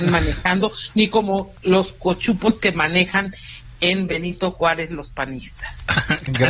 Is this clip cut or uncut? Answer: uncut